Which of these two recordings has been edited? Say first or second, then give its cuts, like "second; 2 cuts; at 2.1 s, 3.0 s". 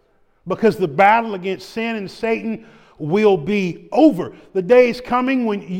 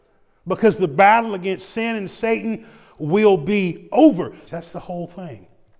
second; 1 cut; at 4.5 s